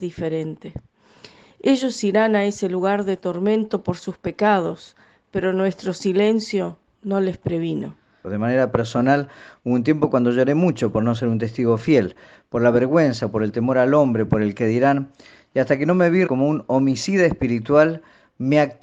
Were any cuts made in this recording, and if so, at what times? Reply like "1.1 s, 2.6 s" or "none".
8.2 s, 16.3 s